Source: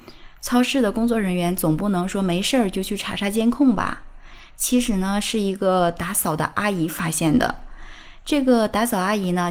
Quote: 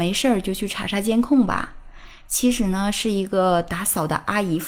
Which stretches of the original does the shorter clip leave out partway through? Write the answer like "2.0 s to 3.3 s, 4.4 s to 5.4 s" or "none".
none